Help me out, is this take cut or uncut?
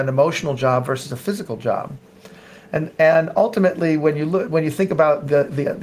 uncut